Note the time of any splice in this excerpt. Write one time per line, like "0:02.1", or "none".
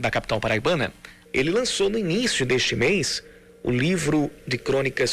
0:01.3

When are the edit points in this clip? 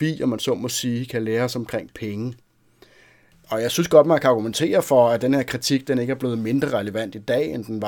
0:03.3

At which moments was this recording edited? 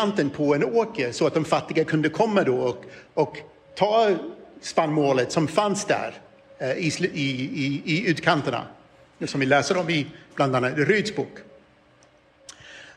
none

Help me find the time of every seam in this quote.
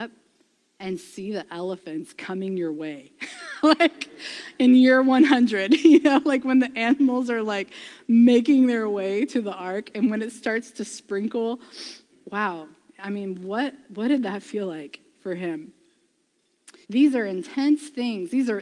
0:12.1
0:16.8

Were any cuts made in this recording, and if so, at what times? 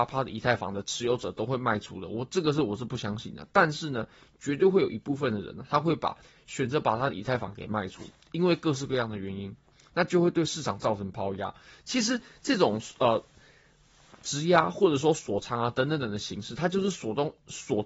none

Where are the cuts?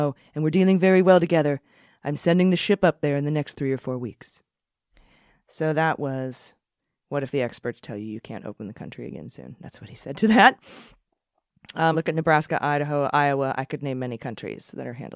0:11.9

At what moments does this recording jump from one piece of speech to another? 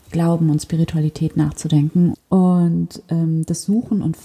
0:02.1

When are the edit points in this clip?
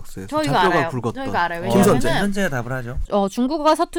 0:03.1

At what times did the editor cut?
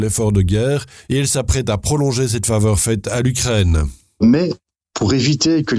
none

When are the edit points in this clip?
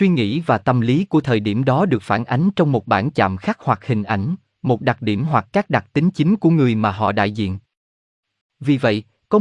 0:08.4

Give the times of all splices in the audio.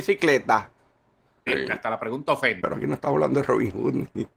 0:01.5
0:02.6

